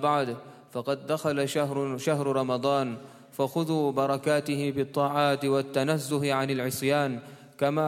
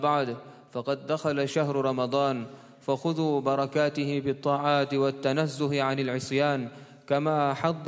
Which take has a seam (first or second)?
second